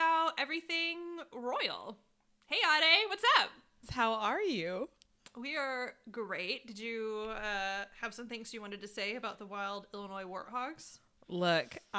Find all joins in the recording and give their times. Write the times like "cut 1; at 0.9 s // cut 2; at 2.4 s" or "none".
cut 1; at 3.8 s